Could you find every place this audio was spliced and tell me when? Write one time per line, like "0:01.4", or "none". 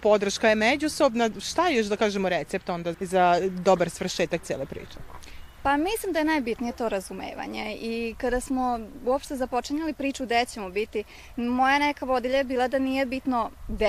0:02.9